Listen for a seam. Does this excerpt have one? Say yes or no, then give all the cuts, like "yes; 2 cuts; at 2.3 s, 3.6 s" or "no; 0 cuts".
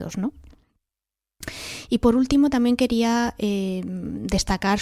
no; 0 cuts